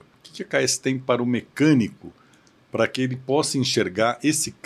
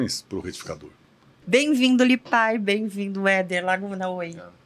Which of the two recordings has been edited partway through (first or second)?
second